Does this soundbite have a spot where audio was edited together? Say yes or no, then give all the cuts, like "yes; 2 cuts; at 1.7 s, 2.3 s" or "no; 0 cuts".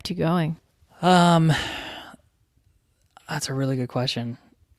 no; 0 cuts